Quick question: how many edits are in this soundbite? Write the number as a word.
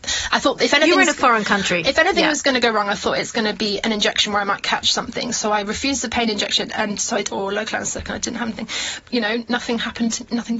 two